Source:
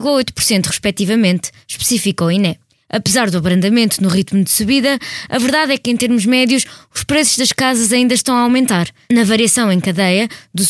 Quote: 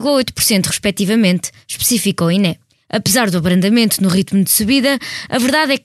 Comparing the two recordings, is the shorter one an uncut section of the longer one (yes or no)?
yes